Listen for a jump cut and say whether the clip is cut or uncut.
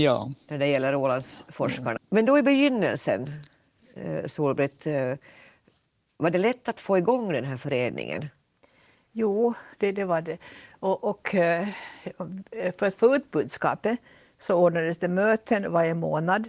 cut